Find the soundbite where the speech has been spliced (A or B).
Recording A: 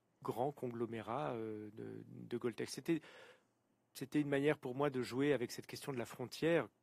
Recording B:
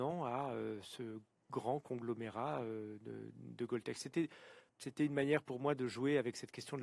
B